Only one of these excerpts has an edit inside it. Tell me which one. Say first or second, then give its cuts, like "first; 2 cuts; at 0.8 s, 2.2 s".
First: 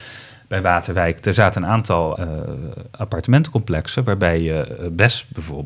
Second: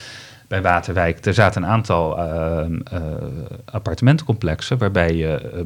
first; 1 cut; at 2.1 s